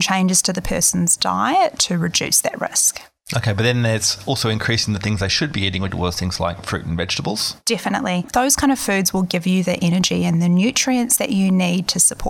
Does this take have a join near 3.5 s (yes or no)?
no